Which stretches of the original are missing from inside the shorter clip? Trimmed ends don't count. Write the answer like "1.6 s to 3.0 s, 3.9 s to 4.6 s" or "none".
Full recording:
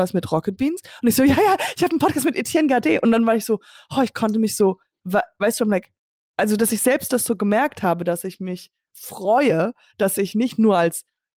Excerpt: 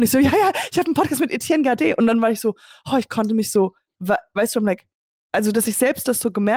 none